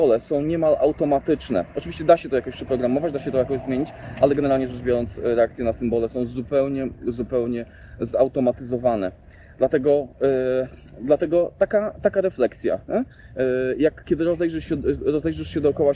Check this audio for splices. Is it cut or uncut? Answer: uncut